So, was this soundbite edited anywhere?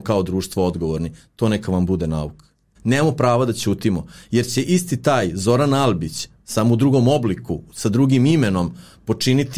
yes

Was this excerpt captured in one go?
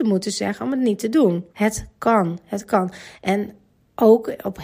no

